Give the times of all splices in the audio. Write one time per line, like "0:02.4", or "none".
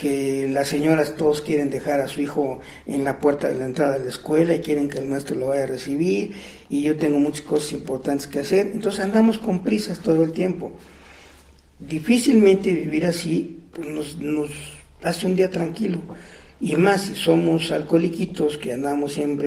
none